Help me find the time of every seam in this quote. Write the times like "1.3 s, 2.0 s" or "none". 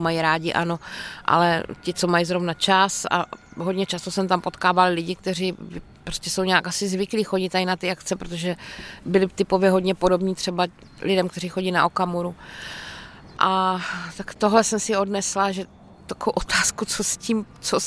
none